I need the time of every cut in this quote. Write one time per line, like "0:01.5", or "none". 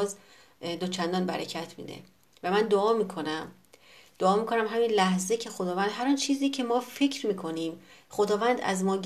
none